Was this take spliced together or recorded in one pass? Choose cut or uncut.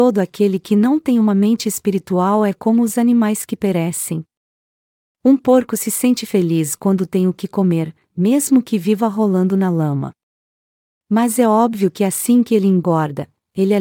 uncut